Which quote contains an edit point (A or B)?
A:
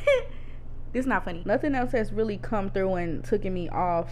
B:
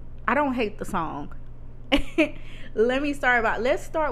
A